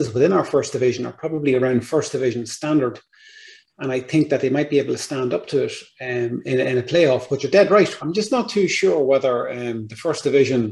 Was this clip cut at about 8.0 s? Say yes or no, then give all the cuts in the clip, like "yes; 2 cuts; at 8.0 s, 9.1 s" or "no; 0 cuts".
yes; 1 cut; at 8.0 s